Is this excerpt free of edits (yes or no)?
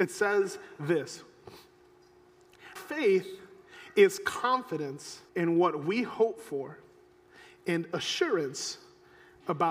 no